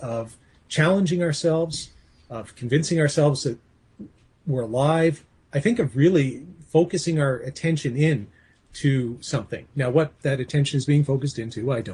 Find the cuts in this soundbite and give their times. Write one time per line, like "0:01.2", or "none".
none

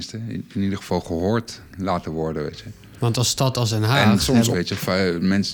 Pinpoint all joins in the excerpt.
0:04.5

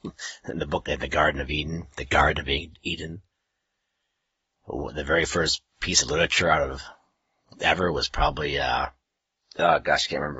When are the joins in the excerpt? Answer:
none

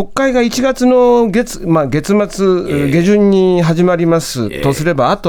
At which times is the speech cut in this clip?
none

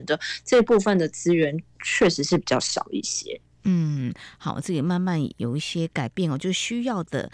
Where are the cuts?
none

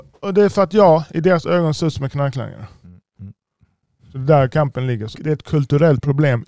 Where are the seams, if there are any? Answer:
0:03.2
0:05.1

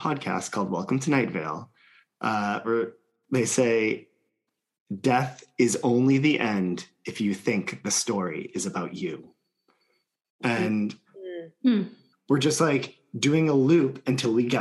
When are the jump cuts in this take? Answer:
0:12.1

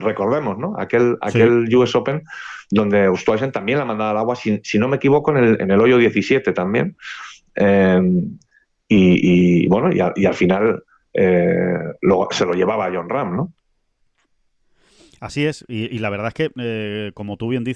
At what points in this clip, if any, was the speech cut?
none

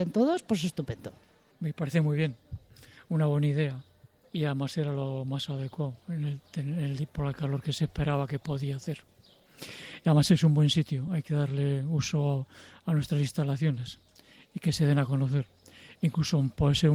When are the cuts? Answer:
none

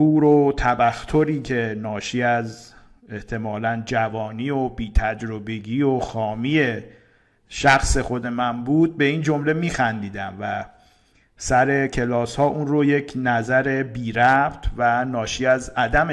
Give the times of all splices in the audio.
none

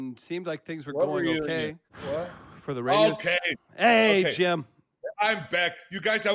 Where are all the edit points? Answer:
0:01.9

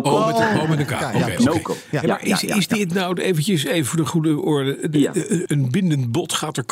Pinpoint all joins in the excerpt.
0:05.5

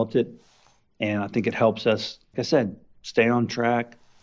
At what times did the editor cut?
0:02.3

